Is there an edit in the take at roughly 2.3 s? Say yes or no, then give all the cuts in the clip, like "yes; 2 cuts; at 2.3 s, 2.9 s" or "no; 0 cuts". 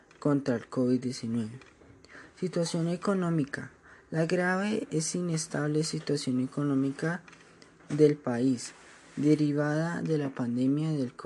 no; 0 cuts